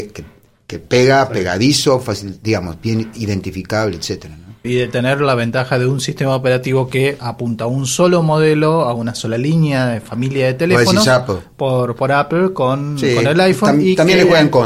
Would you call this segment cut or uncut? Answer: cut